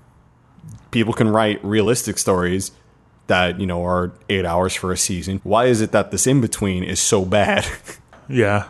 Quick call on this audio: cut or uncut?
cut